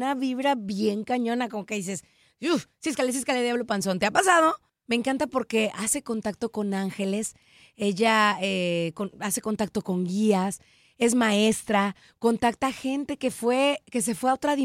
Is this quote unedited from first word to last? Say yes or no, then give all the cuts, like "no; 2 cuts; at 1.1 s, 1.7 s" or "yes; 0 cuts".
no; 1 cut; at 4.8 s